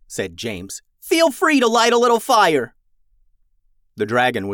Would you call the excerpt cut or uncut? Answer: uncut